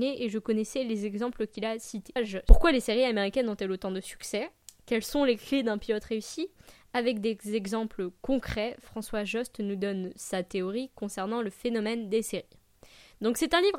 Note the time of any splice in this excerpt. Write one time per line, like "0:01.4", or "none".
0:02.2